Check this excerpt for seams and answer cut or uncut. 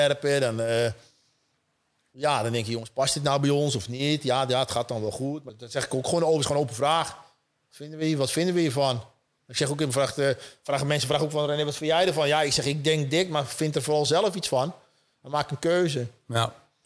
uncut